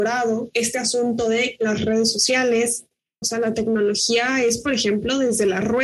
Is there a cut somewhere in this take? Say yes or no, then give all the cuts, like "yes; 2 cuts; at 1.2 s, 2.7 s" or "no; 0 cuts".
yes; 1 cut; at 3.2 s